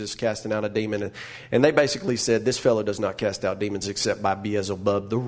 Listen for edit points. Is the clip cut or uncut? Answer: uncut